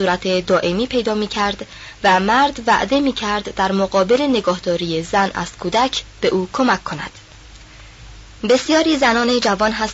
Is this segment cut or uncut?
cut